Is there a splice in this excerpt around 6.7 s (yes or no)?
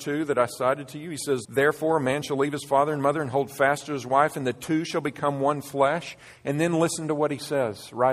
no